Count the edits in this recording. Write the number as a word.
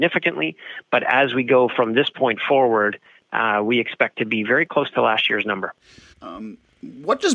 one